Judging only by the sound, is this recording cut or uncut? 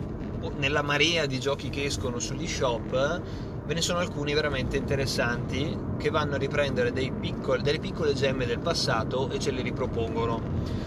uncut